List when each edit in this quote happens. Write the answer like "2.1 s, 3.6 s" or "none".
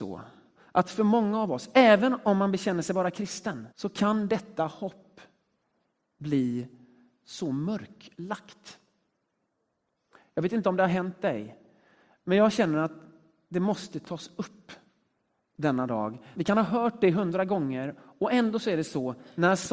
3.7 s, 16.3 s